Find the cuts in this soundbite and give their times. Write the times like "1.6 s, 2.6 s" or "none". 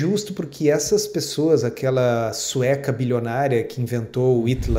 none

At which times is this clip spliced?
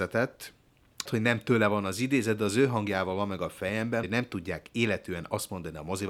1.1 s, 4.0 s

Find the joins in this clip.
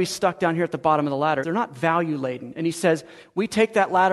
1.4 s

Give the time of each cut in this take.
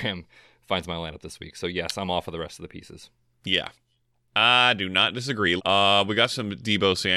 5.6 s

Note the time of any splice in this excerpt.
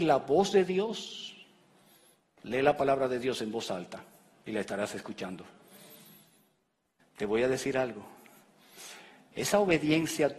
7.0 s

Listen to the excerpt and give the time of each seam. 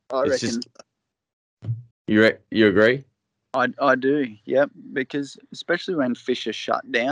1.9 s

